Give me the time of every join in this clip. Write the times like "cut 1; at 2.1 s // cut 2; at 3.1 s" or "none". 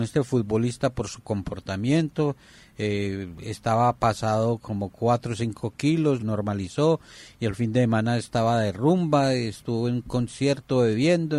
cut 1; at 6.2 s